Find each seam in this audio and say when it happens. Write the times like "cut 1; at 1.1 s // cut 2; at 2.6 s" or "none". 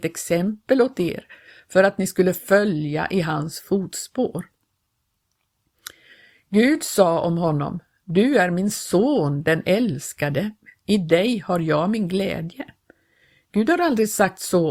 none